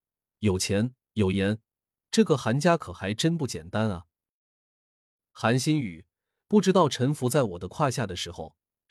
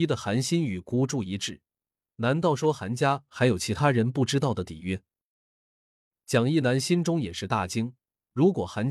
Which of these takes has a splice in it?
second; 1 cut; at 2.0 s

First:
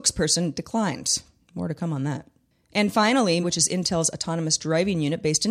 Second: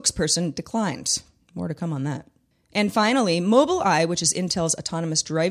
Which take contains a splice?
first; 1 cut; at 3.4 s

